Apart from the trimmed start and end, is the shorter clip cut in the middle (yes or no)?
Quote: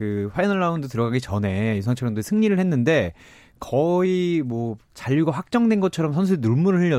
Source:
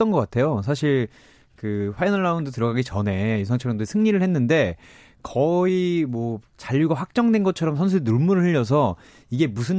no